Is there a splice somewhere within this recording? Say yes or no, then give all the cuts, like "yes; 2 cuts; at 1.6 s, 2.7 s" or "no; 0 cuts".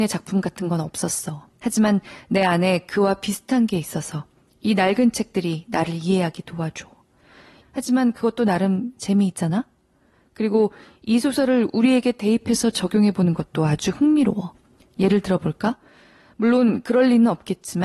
yes; 2 cuts; at 1.5 s, 7.6 s